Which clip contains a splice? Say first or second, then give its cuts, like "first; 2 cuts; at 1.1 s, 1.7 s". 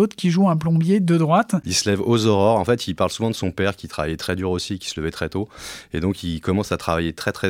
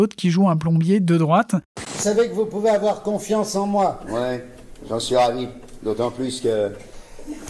first; 1 cut; at 1.6 s